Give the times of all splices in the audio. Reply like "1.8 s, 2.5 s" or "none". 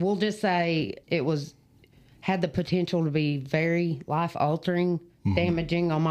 1.0 s